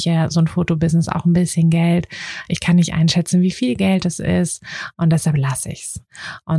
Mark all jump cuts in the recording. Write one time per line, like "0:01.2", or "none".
none